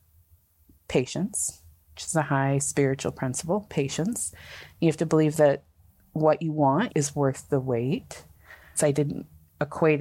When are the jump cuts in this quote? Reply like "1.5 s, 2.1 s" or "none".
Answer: 6.9 s, 8.7 s